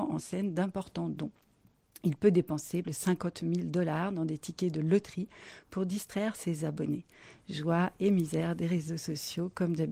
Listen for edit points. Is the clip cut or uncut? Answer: cut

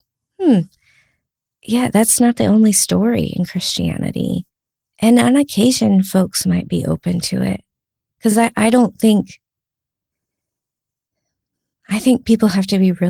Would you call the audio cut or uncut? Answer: uncut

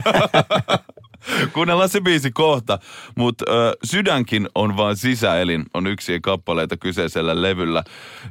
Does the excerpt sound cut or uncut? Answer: uncut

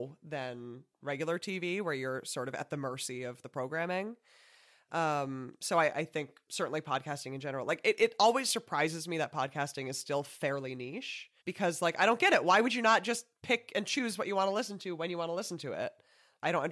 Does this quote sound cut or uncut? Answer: cut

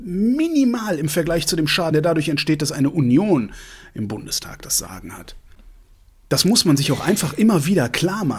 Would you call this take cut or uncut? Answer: uncut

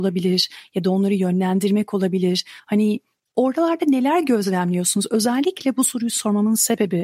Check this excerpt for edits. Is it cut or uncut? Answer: uncut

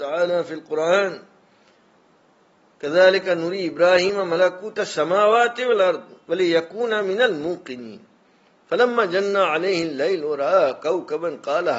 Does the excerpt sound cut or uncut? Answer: uncut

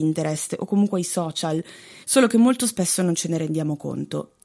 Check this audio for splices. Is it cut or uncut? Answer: cut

